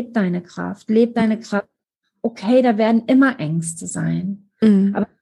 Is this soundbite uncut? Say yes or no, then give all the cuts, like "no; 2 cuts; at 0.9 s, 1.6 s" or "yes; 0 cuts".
yes; 0 cuts